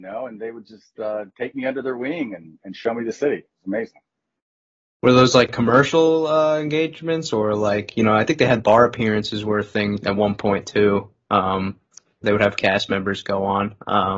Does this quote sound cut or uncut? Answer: uncut